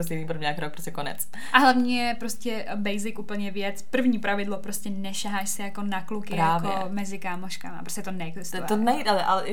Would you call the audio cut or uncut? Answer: uncut